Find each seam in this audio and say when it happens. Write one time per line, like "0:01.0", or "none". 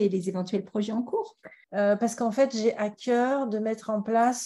0:01.6